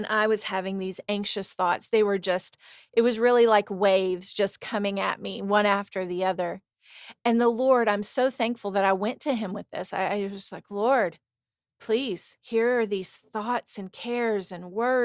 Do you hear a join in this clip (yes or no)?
no